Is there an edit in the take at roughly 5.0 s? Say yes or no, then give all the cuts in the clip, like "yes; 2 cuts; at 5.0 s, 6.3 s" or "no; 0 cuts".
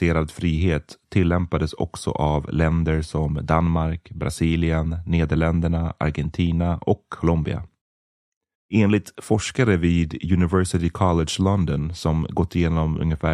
no; 1 cut; at 8.5 s